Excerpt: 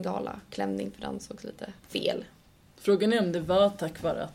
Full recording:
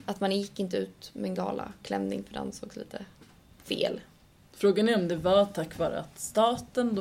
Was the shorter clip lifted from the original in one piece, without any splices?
no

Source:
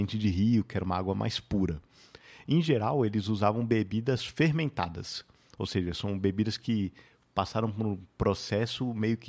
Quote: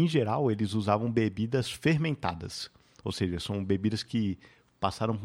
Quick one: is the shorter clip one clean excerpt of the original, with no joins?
yes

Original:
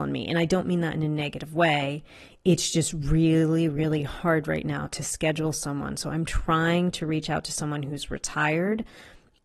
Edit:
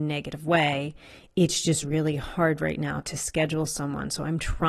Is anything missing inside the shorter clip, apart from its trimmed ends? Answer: yes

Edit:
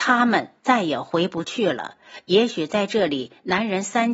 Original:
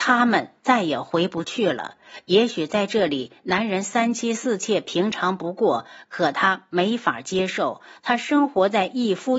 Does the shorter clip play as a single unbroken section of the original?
yes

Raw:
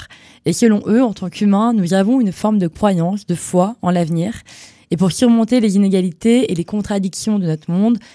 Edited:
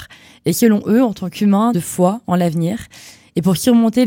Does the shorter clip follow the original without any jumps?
no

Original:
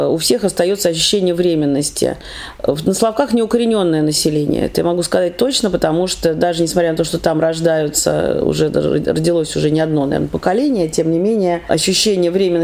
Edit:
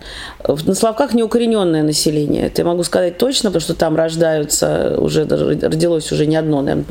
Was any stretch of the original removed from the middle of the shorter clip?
yes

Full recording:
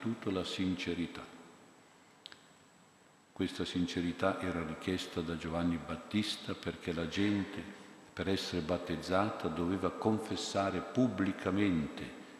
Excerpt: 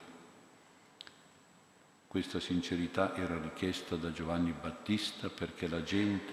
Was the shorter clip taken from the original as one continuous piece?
yes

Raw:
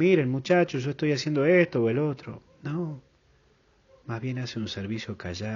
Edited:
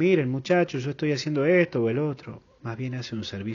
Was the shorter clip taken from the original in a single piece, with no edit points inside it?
no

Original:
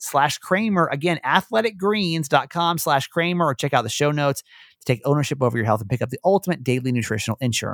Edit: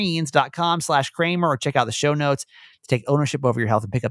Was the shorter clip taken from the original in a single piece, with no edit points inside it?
yes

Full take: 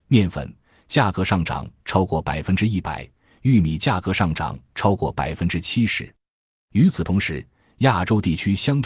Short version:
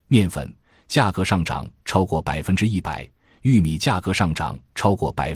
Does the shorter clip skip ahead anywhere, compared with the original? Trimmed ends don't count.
no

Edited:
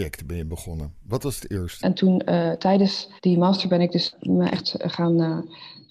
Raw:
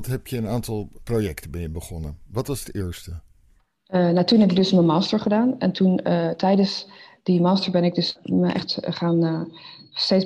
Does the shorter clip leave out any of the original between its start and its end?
yes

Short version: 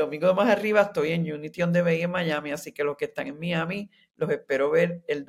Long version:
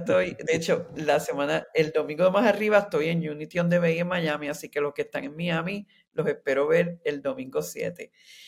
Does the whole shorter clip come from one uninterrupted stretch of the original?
yes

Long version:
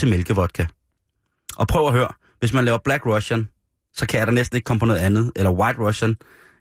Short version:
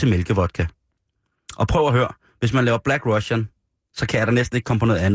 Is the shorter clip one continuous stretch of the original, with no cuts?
yes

